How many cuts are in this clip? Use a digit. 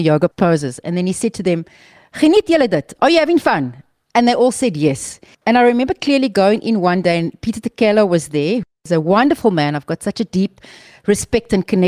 1